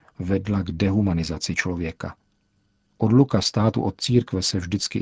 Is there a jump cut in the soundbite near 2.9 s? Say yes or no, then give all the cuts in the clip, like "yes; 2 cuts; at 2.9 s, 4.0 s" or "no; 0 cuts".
yes; 1 cut; at 2.9 s